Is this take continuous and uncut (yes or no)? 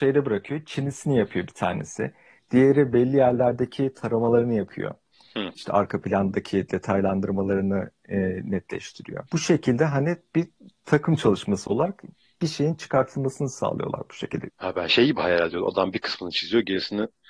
no